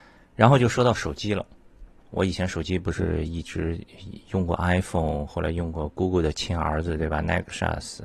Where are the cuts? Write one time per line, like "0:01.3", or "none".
none